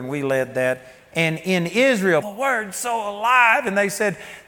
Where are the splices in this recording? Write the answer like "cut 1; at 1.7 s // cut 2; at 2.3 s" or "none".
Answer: cut 1; at 2.2 s